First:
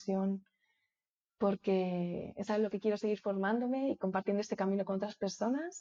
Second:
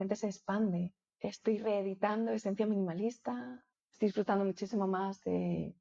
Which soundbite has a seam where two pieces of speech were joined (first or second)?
second